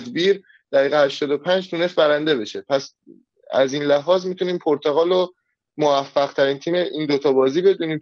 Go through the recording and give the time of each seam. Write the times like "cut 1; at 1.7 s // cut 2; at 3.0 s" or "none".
none